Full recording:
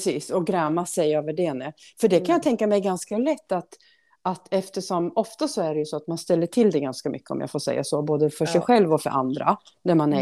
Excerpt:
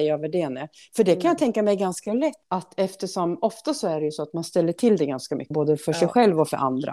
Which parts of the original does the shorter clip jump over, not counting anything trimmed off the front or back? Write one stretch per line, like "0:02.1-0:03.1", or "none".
0:03.5-0:04.2
0:07.2-0:08.0